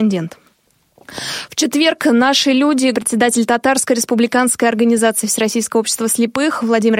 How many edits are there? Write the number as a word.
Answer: one